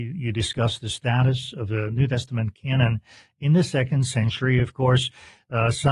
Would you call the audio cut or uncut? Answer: uncut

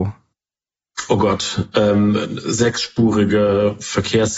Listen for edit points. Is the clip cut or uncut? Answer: uncut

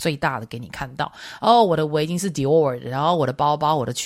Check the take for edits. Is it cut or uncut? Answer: uncut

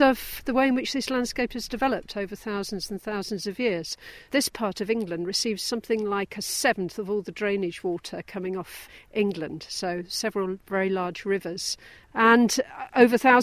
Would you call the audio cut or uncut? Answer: uncut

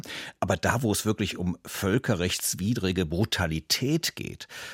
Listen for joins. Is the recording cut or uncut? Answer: uncut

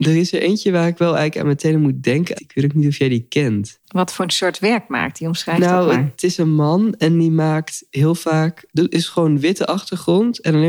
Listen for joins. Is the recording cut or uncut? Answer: cut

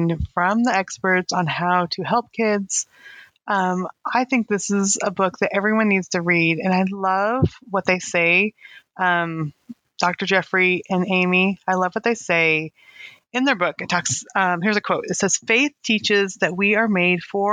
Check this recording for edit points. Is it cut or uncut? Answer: uncut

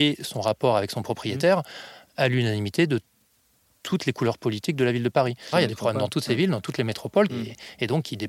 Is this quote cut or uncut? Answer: cut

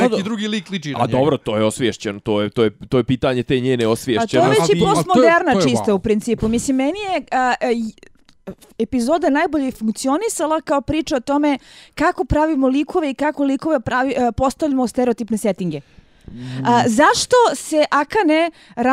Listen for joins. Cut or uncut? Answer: uncut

